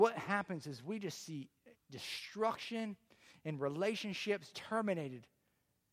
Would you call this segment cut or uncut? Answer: cut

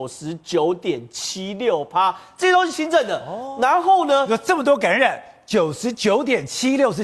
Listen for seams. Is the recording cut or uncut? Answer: uncut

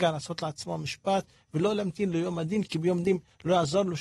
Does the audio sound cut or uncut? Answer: uncut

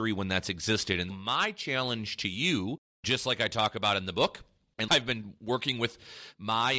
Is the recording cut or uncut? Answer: cut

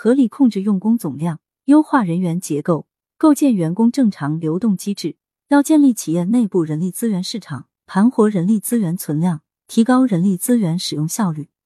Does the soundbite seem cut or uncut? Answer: uncut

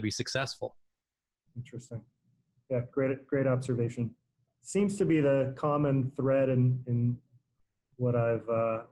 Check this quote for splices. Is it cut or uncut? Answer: uncut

